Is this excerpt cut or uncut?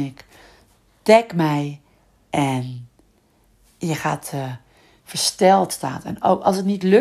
uncut